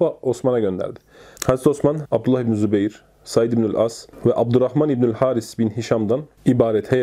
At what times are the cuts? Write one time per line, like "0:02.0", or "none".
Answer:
0:02.0